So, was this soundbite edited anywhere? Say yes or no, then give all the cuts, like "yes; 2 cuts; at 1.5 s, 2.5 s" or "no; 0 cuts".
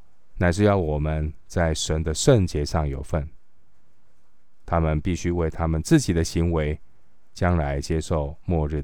yes; 1 cut; at 4.6 s